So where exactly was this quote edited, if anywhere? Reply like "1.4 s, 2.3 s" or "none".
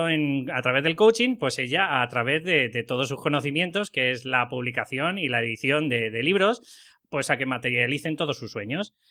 none